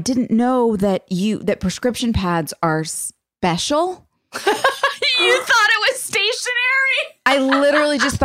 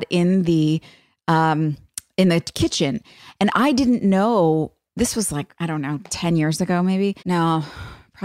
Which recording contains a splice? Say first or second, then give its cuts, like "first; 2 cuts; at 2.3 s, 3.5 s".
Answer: second; 1 cut; at 7.2 s